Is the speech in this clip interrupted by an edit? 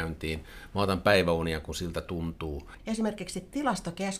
yes; 1 cut; at 2.8 s

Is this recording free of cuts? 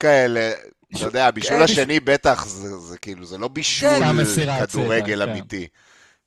yes; 0 cuts

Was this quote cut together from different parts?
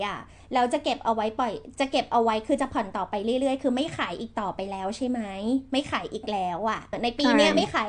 yes; 1 cut; at 6.9 s

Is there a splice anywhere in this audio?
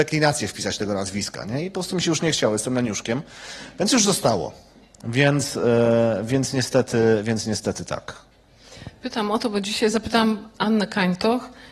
no; 0 cuts

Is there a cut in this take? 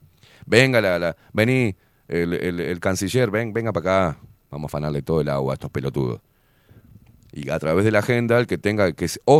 no; 0 cuts

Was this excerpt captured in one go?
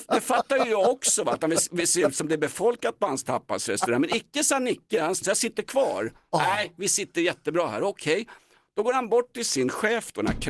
no; 1 cut; at 5.2 s

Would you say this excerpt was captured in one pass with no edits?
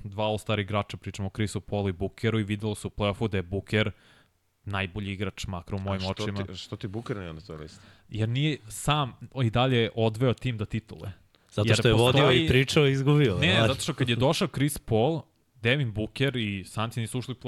yes; 0 cuts

